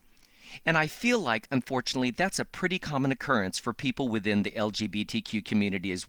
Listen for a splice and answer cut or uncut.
uncut